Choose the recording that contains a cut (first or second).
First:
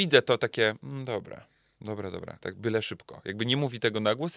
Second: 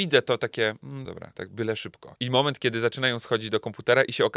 second